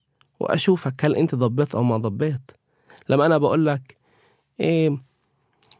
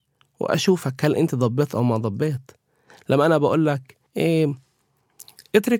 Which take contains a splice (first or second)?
second